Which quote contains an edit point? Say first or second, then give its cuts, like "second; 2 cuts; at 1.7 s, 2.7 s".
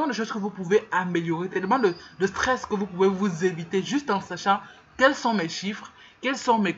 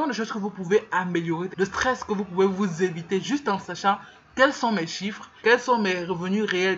second; 2 cuts; at 1.5 s, 5.4 s